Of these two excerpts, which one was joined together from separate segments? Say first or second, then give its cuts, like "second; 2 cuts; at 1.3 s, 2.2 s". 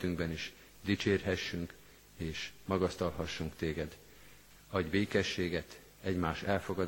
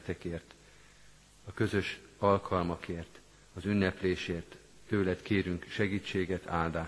first; 2 cuts; at 4.5 s, 5.9 s